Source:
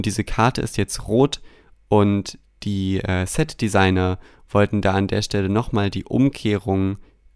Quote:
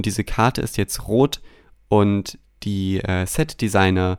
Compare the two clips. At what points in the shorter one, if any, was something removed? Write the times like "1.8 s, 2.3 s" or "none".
none